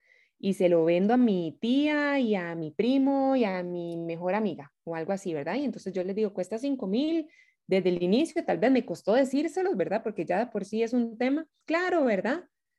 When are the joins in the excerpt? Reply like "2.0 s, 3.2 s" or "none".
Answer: 11.6 s